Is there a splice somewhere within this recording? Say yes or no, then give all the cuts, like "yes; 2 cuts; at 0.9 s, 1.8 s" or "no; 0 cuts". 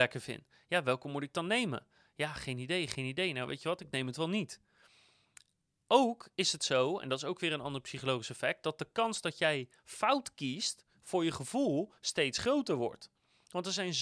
no; 0 cuts